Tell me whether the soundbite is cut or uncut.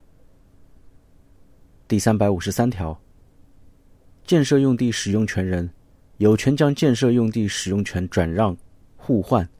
uncut